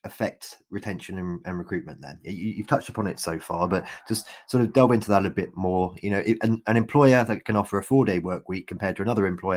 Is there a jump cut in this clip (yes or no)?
no